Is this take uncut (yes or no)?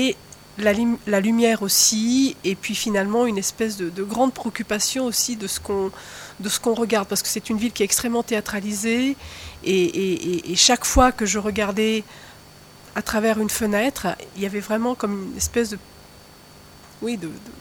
yes